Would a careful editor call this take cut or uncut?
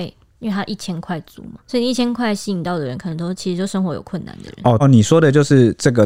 cut